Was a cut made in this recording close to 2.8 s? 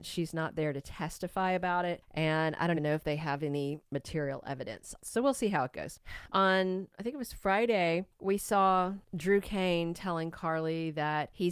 yes; 3 cuts; at 2.8 s, 5.0 s, 6.3 s

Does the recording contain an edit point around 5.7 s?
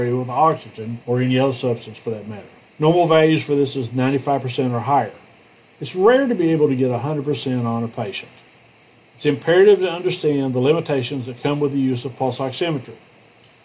no; 0 cuts

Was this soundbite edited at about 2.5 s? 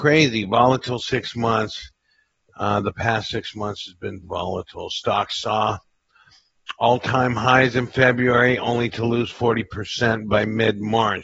no; 1 cut; at 4.2 s

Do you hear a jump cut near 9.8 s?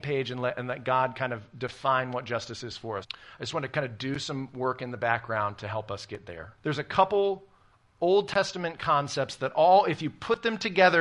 no; 2 cuts; at 3.0 s, 6.6 s

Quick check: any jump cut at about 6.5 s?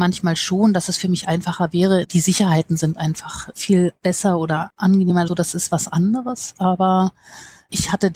no; 2 cuts; at 2.0 s, 5.3 s

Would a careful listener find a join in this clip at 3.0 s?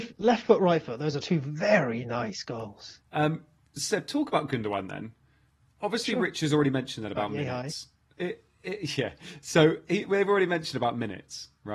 no; 0 cuts

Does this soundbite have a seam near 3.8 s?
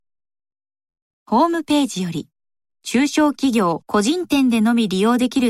yes; 2 cuts; at 2.7 s, 3.8 s

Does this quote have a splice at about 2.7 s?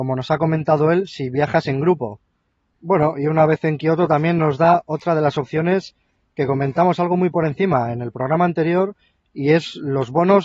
yes; 1 cut; at 2.7 s

